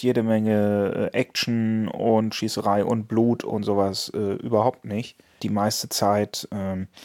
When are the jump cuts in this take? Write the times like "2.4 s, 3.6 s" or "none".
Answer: 5.4 s